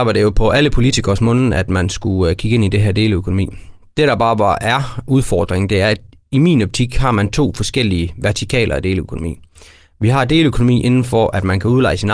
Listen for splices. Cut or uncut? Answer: uncut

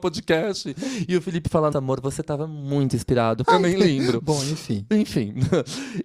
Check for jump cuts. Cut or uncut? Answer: cut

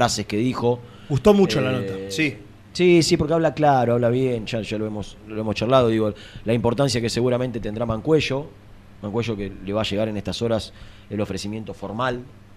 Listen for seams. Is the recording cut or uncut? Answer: uncut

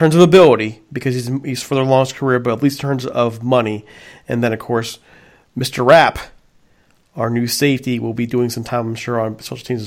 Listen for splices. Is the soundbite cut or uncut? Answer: uncut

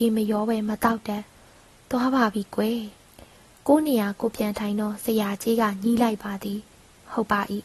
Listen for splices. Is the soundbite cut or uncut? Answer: cut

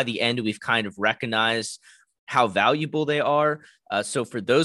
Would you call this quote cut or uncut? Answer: uncut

